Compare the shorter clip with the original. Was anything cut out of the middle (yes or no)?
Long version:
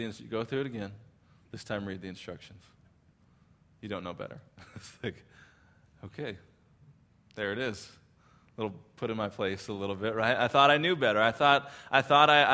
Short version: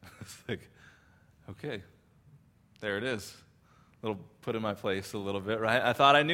no